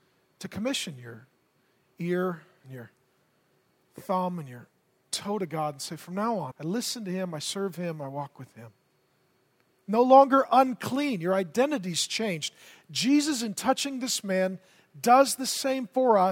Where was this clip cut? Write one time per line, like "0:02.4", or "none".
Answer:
0:06.5